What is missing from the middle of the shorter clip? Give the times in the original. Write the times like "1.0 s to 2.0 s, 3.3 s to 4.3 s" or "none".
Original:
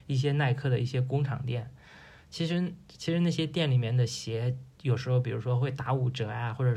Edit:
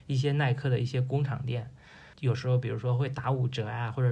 2.1 s to 4.8 s